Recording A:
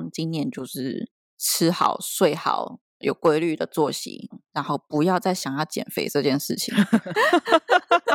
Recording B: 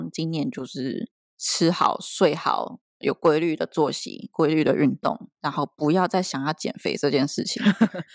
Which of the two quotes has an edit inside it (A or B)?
A